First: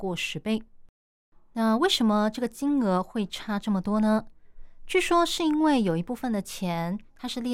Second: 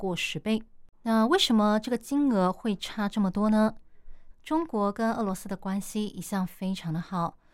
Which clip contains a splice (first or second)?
second